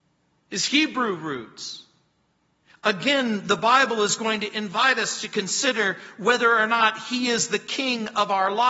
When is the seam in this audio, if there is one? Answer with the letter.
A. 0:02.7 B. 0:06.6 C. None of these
A